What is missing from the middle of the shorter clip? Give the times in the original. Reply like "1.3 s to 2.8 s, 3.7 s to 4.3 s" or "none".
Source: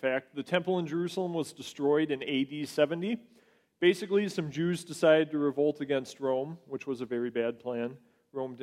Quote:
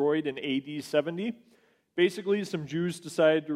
none